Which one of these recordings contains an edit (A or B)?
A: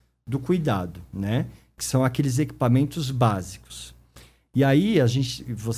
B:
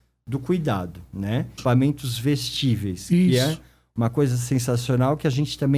B